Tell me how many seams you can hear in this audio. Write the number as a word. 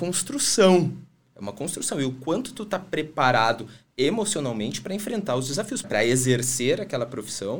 one